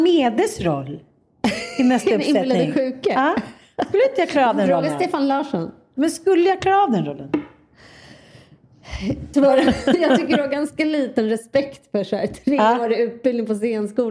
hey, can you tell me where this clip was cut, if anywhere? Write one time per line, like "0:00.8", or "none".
0:09.3